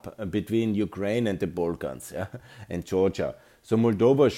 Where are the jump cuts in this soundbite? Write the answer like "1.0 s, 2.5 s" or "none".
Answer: none